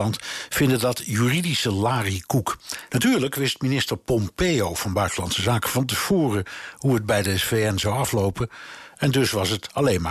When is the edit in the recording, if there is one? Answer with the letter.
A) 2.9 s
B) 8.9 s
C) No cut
A